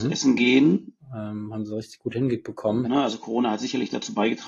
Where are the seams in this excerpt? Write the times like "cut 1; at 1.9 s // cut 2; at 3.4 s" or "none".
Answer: cut 1; at 1.0 s // cut 2; at 2.8 s